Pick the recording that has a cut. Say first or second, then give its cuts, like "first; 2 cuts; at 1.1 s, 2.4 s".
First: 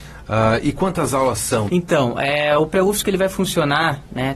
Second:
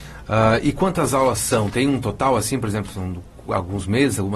first; 1 cut; at 1.7 s